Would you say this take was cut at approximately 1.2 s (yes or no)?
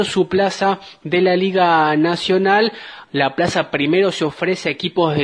no